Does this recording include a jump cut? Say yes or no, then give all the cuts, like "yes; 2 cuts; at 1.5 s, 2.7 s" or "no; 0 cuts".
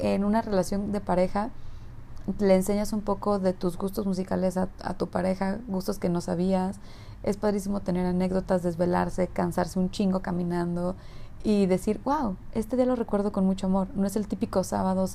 no; 0 cuts